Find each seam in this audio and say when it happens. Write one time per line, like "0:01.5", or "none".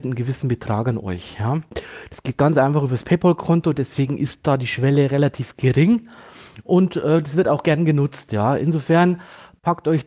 none